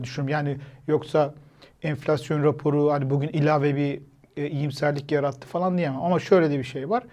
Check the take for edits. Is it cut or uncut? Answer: uncut